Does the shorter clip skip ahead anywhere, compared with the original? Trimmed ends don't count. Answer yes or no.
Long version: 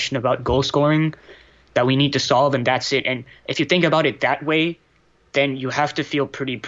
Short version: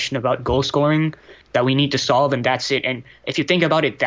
yes